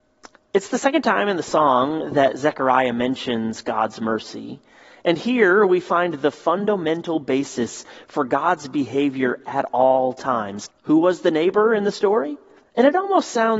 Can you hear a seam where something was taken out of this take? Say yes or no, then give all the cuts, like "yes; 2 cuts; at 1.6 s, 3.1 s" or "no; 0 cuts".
yes; 2 cuts; at 10.7 s, 12.6 s